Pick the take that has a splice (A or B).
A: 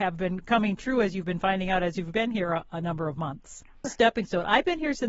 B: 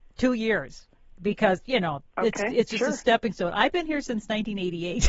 A